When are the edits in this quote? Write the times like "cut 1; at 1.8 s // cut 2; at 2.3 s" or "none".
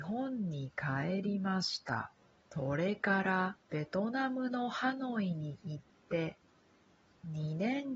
cut 1; at 2.5 s // cut 2; at 3.6 s